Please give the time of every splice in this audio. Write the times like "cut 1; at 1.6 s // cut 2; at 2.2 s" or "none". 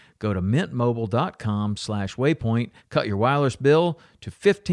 cut 1; at 2.8 s